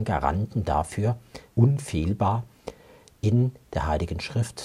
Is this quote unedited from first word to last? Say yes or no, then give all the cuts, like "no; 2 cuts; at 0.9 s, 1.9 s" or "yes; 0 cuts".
no; 1 cut; at 1.5 s